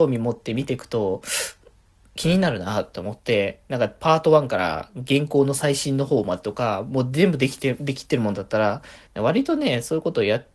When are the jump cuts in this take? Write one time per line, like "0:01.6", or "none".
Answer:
0:09.1